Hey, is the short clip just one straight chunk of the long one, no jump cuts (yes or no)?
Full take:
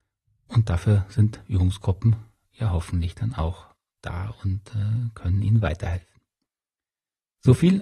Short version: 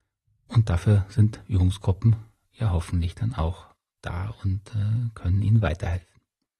yes